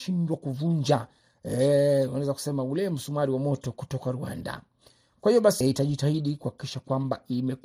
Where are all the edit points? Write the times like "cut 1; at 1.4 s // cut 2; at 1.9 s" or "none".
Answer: cut 1; at 5.6 s